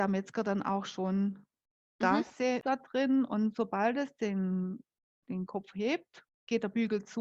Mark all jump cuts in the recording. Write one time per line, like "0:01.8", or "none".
0:02.6